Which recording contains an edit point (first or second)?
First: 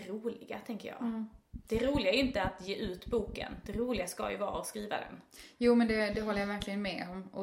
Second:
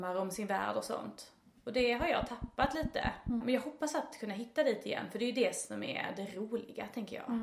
second